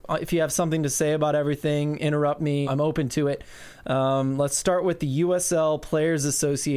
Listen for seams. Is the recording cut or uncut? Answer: cut